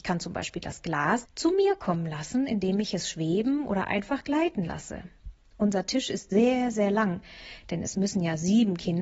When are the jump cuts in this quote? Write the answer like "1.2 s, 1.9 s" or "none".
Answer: 1.2 s